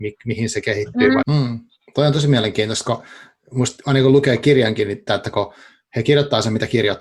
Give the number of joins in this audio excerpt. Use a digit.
2